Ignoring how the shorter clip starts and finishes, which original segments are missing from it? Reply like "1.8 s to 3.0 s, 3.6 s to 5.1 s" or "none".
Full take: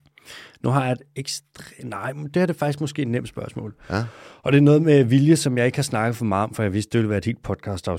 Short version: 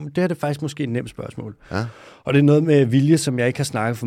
none